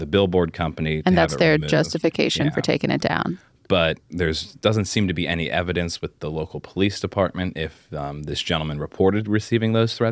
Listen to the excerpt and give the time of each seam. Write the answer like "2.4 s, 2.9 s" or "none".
4.0 s